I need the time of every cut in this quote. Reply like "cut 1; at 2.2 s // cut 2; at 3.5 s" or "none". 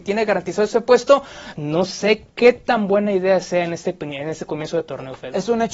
cut 1; at 1.5 s